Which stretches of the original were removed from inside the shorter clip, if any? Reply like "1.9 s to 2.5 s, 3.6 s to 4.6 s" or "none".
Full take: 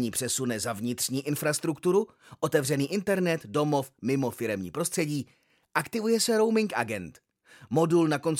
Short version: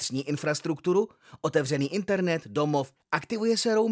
3.9 s to 5.6 s